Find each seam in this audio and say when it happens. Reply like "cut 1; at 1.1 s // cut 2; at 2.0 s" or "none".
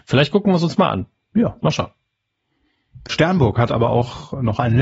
cut 1; at 3.1 s